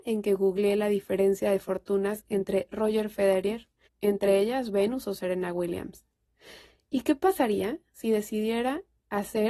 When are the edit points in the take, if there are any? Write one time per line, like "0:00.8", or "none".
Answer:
0:03.9